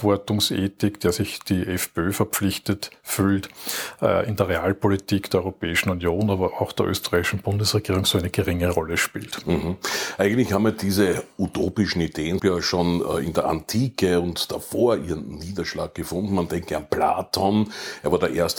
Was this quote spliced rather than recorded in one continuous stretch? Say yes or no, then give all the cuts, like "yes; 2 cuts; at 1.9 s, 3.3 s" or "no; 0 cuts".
yes; 1 cut; at 12.4 s